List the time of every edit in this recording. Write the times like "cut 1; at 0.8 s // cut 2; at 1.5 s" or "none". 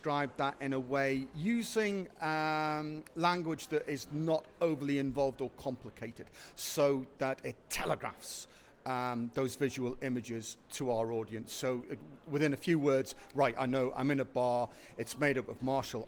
none